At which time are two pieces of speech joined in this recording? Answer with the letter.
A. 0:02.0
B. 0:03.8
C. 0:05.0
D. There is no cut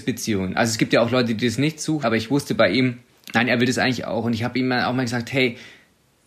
A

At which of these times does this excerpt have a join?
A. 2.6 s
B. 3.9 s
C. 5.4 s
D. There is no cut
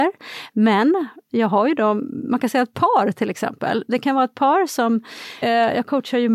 C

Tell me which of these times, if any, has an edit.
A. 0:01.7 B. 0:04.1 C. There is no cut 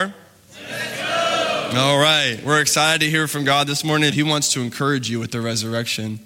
B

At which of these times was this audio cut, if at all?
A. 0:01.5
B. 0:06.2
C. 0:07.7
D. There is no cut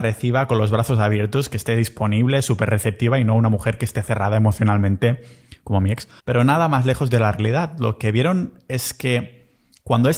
B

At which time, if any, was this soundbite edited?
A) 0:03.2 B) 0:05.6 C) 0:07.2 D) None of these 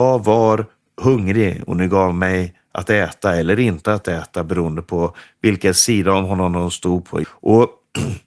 C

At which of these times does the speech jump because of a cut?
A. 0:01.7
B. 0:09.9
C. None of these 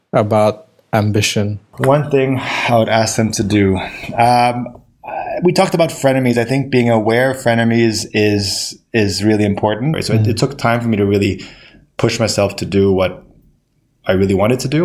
B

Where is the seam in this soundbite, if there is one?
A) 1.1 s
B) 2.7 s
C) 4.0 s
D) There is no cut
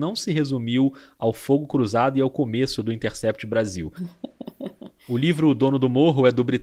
C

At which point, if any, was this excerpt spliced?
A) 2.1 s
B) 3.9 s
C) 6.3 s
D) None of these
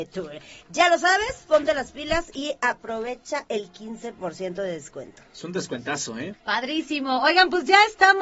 C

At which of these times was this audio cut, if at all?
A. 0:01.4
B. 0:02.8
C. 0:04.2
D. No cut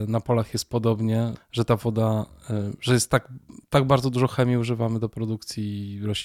A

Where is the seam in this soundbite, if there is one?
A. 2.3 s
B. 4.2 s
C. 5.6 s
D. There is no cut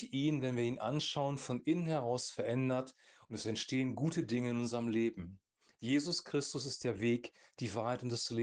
C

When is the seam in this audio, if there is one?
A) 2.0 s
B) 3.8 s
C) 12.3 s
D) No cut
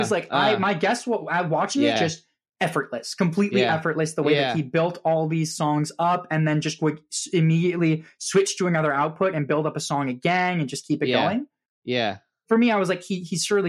A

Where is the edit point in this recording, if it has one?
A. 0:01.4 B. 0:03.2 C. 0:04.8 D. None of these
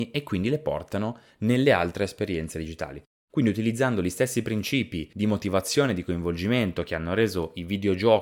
D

